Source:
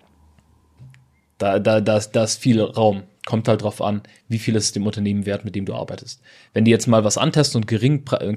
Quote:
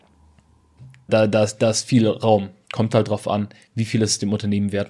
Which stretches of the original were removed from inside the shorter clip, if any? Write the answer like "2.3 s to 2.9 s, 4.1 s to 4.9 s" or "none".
1.1 s to 1.6 s